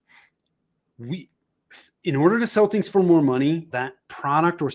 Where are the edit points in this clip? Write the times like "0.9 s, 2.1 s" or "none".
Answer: 3.7 s